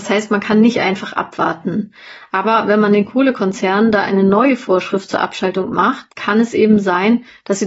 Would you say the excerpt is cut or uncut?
uncut